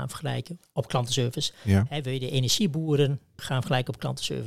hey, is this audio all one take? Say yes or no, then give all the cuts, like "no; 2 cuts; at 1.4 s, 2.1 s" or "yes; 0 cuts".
no; 1 cut; at 3.4 s